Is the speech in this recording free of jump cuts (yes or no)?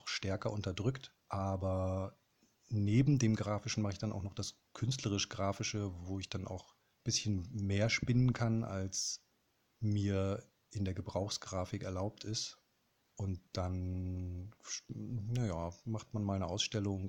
yes